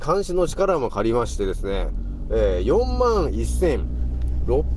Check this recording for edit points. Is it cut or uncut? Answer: uncut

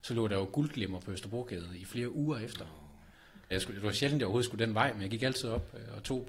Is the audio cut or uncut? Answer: cut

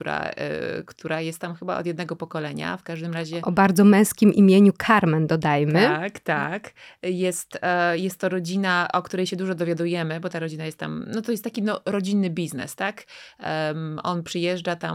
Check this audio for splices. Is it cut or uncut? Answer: uncut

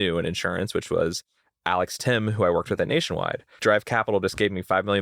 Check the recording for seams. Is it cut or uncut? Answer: cut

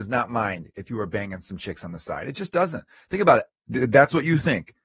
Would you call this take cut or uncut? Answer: cut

